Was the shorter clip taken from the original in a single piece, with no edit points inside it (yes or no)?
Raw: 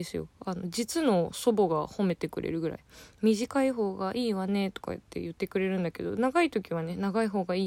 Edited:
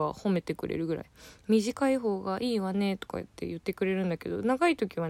yes